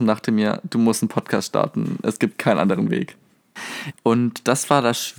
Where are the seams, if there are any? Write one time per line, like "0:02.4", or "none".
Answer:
0:03.9